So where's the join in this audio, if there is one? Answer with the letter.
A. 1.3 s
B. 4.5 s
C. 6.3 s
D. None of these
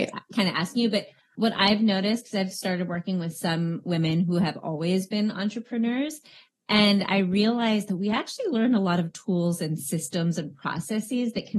A